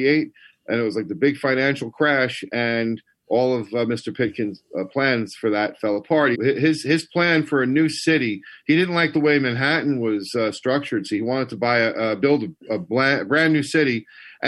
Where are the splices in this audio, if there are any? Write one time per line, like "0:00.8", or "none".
0:06.3

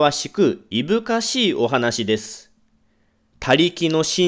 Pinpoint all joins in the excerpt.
none

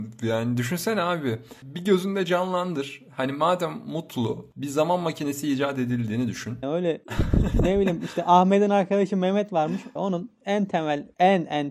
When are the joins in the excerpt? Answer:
0:06.6
0:10.0

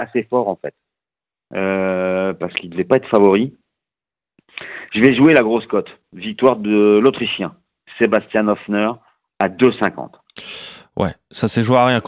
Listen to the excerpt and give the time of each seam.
none

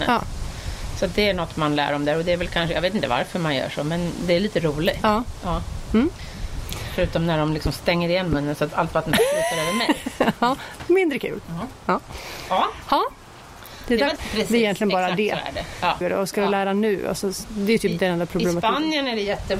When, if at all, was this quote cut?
0:14.2
0:16.0

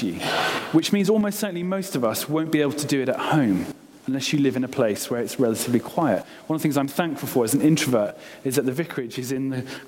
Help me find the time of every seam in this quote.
none

